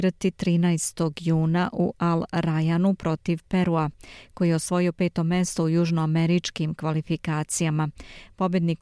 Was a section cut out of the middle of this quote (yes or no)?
no